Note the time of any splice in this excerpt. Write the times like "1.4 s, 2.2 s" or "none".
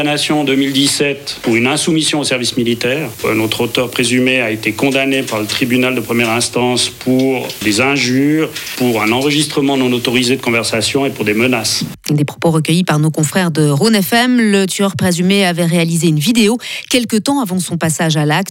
7.6 s

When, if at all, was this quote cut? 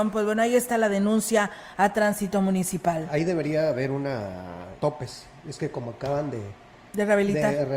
4.8 s

